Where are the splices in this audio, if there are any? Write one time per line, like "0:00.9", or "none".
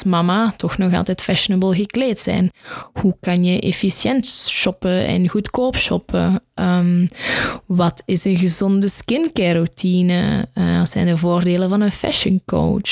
none